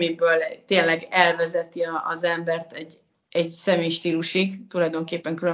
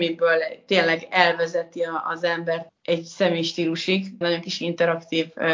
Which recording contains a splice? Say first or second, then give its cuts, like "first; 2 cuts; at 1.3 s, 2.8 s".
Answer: second; 2 cuts; at 2.7 s, 4.2 s